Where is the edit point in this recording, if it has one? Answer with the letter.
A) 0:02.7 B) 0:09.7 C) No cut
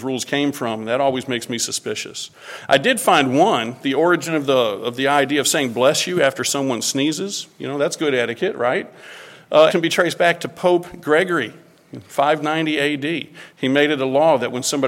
B